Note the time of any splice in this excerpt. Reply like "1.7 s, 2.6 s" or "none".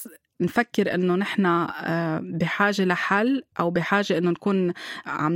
3.5 s